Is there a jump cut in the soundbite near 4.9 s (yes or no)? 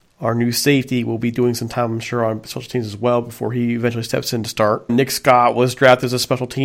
yes